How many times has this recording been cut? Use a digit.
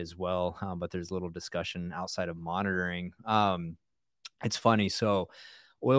0